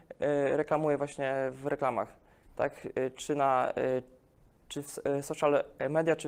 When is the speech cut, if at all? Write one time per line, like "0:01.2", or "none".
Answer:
none